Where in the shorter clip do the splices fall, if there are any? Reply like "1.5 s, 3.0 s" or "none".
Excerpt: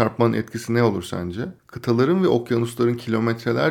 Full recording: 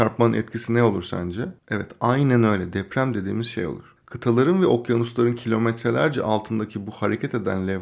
1.6 s

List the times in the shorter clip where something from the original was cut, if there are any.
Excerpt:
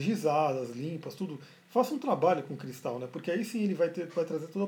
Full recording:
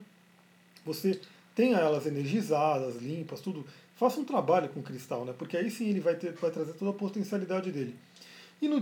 none

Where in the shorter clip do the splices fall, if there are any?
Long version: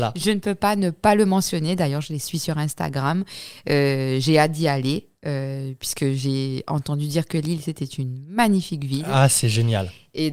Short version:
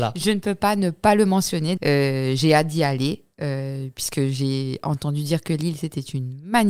1.8 s

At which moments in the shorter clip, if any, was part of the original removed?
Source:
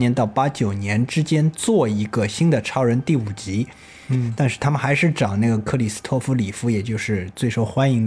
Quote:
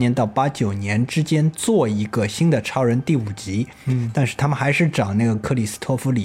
3.8 s

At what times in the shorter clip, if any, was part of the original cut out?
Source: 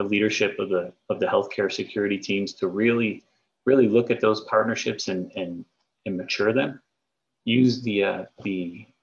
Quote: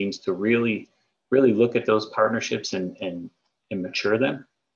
none

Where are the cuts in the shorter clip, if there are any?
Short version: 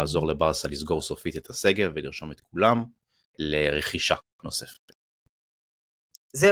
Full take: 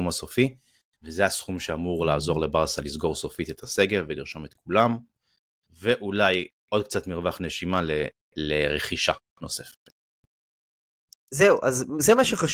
3.2 s

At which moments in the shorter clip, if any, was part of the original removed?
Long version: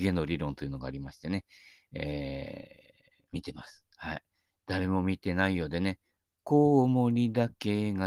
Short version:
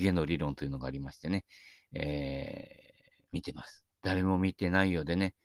3.9 s

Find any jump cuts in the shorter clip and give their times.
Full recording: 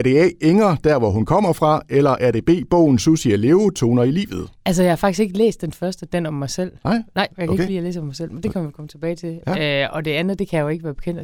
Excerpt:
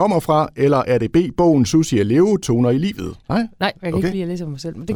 3.2 s

